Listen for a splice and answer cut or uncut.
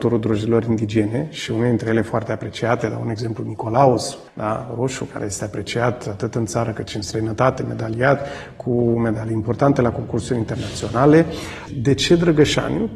cut